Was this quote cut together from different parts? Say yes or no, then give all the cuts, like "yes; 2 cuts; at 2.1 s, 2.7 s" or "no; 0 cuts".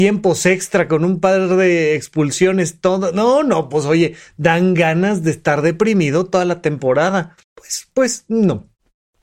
yes; 1 cut; at 7.4 s